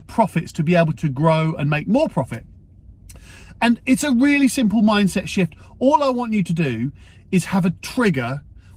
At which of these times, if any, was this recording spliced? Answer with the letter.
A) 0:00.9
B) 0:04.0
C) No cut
A